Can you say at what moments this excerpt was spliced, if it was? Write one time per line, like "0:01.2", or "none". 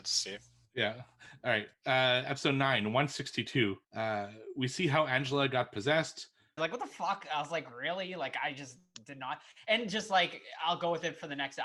0:06.6